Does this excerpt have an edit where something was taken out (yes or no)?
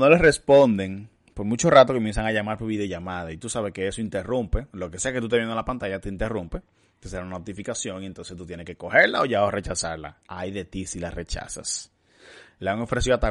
no